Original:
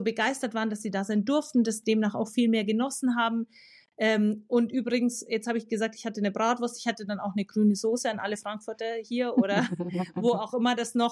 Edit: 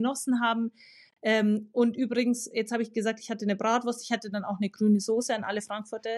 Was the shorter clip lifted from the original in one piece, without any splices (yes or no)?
yes